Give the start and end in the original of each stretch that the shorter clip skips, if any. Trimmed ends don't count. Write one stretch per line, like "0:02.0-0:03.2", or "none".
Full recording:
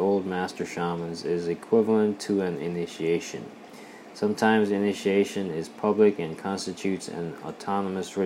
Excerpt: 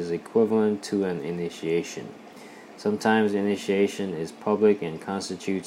none